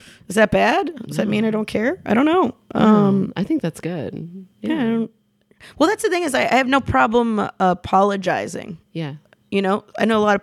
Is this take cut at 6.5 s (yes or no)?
no